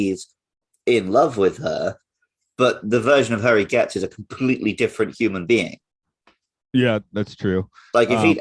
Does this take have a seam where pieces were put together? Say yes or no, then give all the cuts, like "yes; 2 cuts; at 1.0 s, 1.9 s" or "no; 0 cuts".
no; 0 cuts